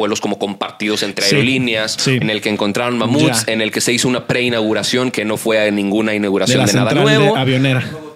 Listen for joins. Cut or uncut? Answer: cut